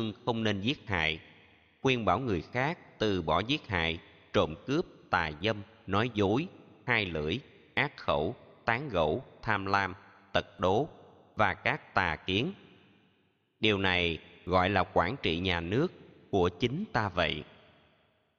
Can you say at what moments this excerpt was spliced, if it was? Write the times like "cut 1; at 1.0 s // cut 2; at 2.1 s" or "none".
none